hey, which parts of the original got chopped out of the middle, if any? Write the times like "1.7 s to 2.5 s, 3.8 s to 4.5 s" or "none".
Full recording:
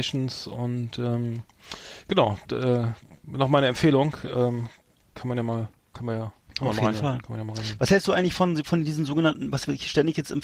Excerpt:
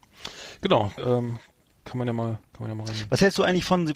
2.4 s to 4.3 s, 5.8 s to 7.2 s